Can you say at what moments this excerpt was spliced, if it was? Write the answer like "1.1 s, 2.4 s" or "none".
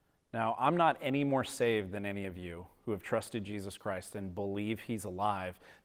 none